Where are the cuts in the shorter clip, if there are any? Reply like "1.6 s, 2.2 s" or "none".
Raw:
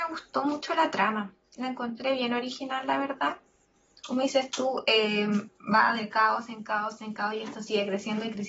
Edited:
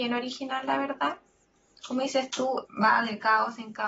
2.6 s